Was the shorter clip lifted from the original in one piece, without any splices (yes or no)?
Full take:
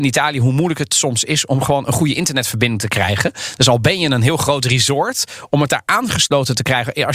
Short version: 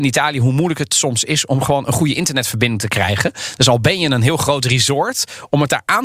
yes